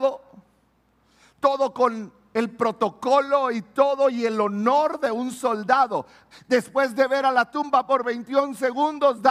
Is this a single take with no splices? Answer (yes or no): no